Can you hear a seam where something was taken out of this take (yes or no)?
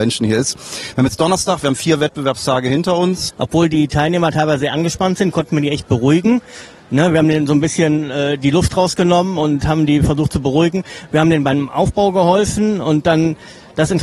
yes